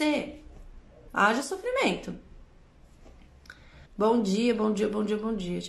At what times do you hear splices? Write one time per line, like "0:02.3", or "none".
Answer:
0:01.1
0:03.8